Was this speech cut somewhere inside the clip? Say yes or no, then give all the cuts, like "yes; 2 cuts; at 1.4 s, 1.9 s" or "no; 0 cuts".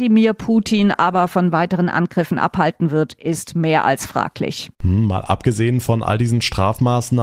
yes; 1 cut; at 4.7 s